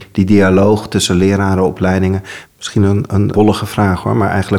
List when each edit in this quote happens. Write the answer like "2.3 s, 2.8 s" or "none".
3.3 s